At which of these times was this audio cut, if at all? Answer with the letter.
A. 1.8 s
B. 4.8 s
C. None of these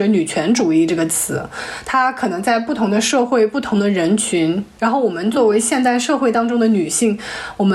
B